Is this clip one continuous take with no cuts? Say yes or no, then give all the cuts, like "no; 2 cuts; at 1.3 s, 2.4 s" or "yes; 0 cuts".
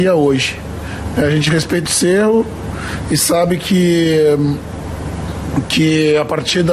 no; 1 cut; at 1.9 s